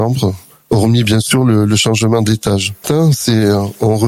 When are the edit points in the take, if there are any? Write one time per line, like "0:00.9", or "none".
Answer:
0:02.8